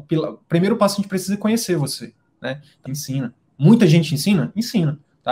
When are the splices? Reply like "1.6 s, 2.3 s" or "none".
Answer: 2.9 s